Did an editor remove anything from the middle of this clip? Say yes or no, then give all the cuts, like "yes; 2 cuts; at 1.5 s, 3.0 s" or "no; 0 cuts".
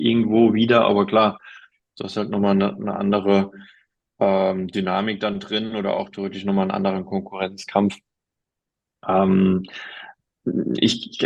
no; 0 cuts